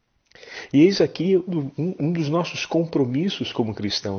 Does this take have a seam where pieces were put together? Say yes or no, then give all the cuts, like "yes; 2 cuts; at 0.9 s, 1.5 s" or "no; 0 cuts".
yes; 1 cut; at 1.5 s